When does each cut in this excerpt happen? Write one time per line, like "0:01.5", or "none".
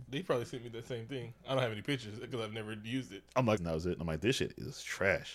0:03.6

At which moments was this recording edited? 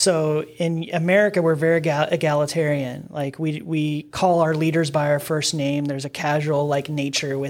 none

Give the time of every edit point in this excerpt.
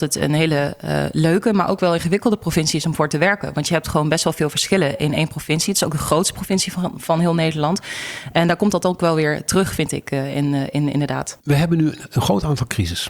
0:11.4

